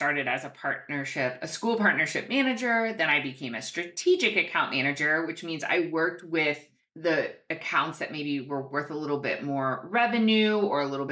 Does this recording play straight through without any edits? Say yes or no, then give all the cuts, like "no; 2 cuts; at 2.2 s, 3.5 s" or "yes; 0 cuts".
yes; 0 cuts